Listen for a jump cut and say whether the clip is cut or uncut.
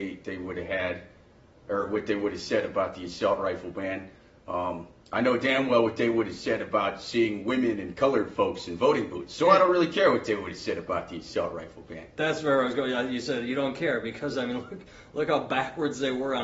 uncut